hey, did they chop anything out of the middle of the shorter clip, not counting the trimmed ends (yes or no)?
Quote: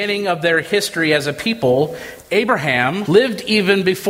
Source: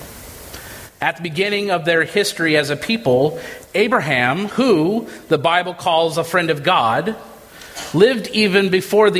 yes